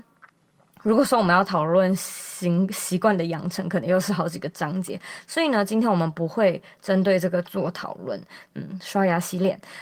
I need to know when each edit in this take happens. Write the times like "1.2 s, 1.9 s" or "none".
8.5 s